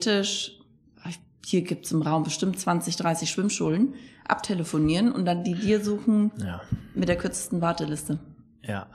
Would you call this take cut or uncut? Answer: uncut